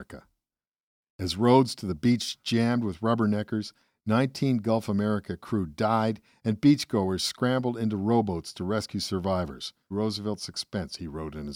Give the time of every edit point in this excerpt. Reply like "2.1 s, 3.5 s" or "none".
1.0 s, 9.9 s